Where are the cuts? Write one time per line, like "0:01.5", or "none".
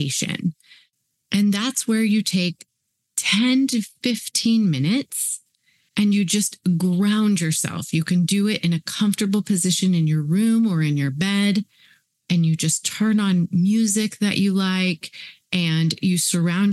none